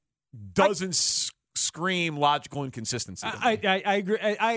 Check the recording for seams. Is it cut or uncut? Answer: uncut